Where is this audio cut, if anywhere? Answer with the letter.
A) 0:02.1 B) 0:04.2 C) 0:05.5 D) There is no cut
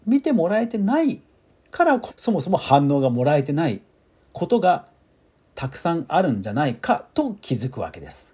A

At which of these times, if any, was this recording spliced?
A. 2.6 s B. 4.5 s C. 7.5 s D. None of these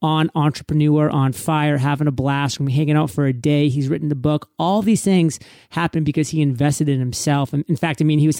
D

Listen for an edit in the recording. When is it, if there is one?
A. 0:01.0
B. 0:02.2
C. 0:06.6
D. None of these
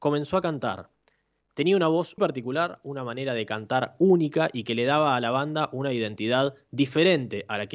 B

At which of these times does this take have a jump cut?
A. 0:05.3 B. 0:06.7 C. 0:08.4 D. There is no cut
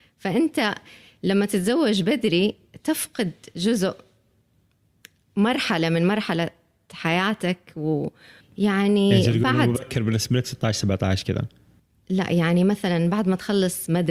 C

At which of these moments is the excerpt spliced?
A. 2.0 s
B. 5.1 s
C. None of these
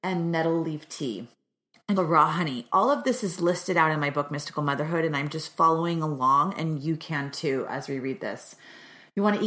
A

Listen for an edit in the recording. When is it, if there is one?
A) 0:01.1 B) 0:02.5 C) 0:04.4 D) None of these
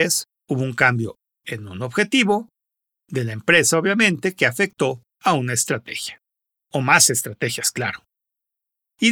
D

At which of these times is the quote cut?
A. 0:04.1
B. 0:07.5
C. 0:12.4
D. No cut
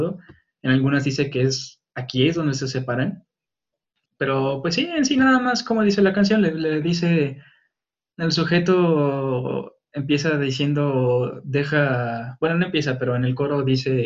A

